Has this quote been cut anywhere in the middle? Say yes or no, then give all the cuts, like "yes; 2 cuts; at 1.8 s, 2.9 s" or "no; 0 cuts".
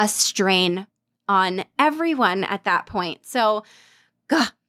no; 0 cuts